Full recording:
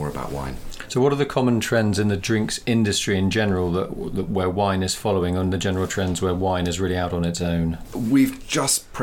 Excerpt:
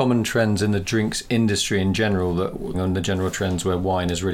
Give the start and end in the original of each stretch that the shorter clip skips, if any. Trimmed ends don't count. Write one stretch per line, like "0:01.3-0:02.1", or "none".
0:04.1-0:05.3